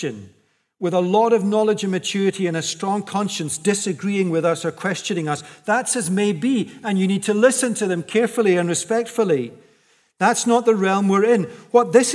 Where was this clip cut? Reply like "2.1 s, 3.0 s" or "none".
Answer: none